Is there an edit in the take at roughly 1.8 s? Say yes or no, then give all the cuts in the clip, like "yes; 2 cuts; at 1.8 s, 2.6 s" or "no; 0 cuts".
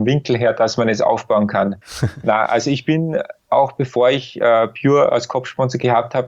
yes; 1 cut; at 1.8 s